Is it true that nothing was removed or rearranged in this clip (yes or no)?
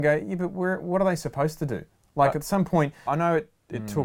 no